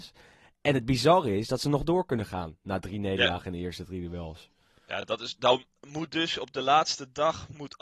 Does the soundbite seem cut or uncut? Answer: uncut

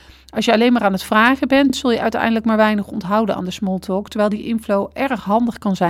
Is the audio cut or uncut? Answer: uncut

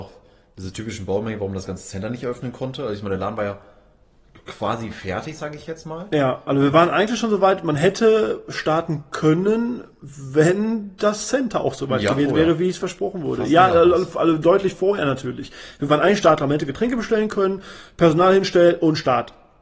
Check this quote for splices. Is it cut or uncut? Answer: uncut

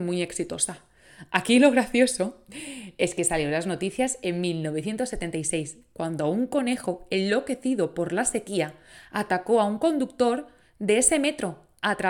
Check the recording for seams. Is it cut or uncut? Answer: uncut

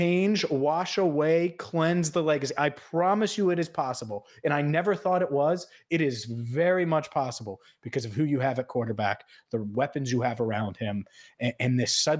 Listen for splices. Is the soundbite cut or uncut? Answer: uncut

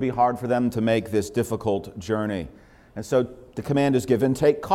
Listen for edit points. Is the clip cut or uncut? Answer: uncut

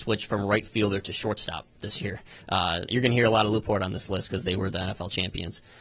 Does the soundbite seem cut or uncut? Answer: cut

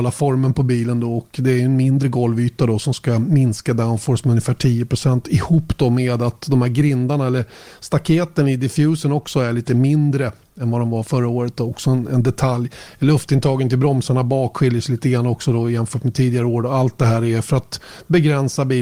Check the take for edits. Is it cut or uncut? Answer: uncut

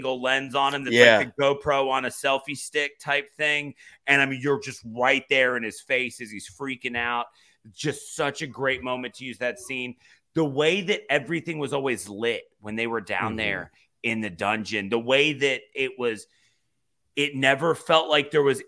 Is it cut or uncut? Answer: uncut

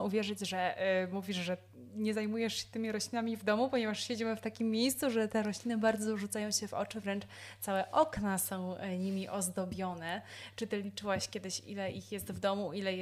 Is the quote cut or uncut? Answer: uncut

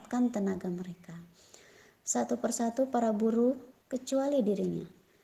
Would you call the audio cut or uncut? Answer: cut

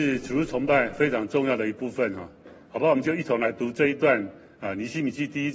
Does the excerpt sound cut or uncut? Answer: uncut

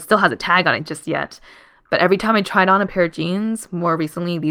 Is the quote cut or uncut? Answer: uncut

